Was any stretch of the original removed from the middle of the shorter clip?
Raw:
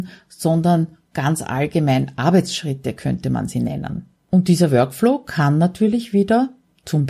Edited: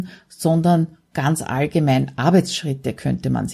no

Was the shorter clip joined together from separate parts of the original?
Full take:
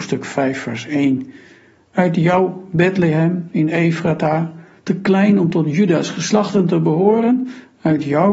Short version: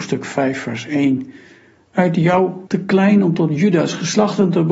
yes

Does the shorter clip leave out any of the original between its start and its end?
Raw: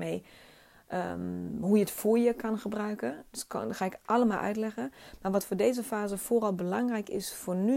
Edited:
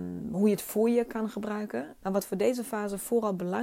yes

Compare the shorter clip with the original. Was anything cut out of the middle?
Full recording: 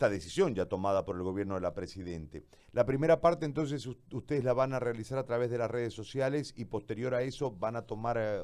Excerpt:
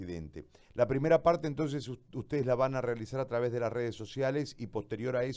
no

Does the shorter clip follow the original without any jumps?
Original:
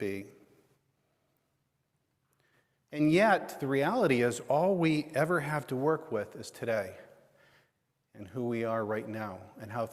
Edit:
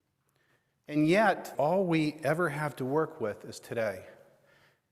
no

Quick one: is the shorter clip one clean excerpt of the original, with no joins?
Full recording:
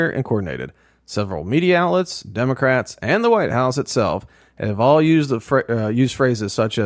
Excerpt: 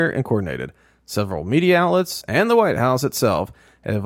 no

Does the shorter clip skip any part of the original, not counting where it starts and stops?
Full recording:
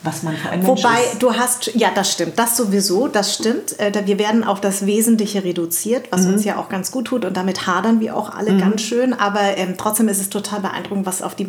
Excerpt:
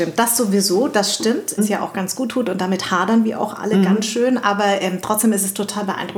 yes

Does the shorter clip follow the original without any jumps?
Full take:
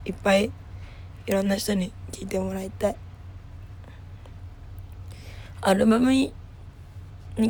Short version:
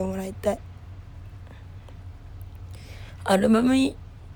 yes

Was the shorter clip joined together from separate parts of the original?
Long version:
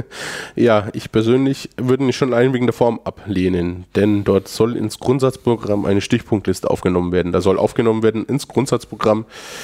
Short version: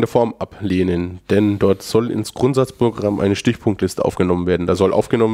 no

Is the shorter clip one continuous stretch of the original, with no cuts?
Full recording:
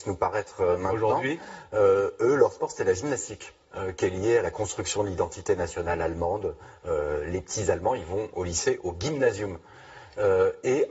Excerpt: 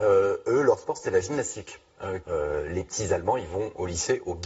no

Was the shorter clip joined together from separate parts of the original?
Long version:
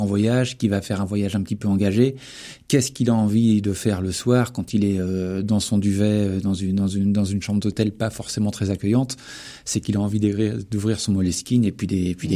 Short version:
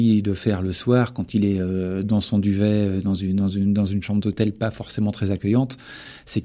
no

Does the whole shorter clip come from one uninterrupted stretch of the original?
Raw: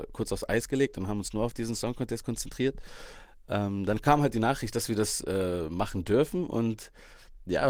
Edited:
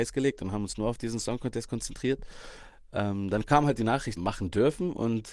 no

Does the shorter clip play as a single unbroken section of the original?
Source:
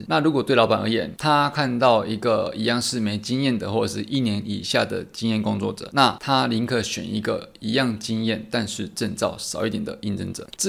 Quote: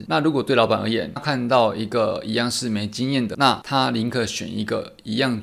no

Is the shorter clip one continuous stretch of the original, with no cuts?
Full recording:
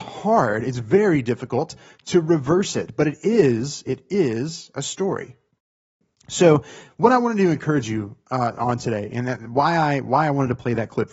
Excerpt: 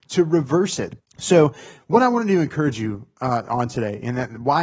no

